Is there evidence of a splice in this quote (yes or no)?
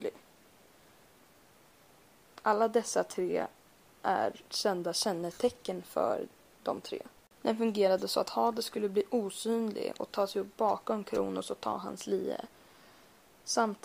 yes